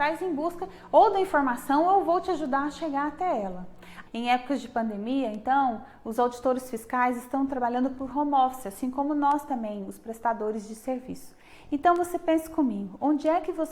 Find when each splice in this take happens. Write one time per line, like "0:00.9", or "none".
0:04.1